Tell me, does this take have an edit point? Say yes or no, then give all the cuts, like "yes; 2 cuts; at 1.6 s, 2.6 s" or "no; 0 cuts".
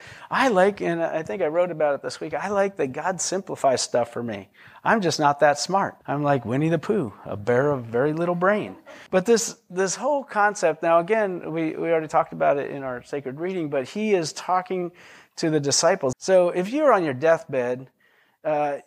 yes; 3 cuts; at 6.0 s, 9.1 s, 16.1 s